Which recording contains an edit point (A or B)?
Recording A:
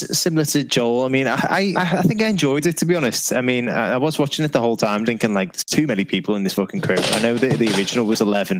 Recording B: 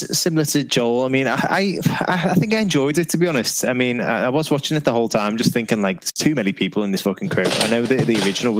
A